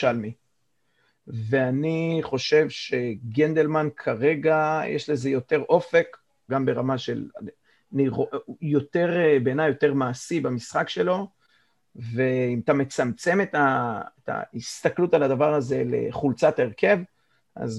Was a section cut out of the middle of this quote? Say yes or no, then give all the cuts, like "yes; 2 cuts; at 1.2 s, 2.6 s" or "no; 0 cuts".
yes; 1 cut; at 6.5 s